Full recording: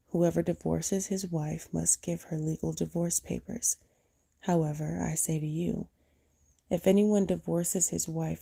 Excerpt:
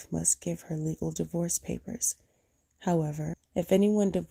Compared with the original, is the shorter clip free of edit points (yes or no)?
no